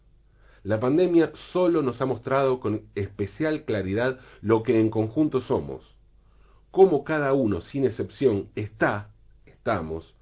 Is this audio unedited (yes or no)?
yes